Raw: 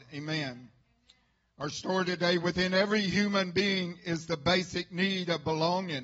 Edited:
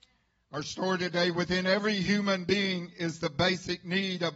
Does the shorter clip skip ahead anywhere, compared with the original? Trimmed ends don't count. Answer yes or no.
no